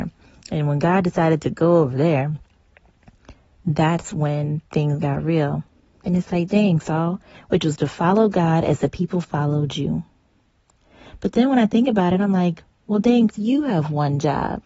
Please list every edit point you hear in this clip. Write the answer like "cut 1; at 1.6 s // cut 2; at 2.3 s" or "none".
cut 1; at 6.0 s // cut 2; at 7.3 s // cut 3; at 13.3 s